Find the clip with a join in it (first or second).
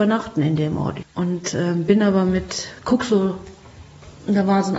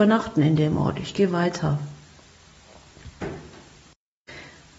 first